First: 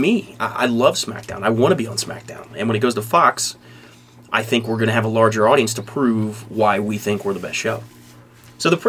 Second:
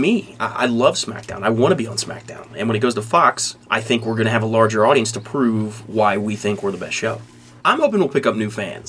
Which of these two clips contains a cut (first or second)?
second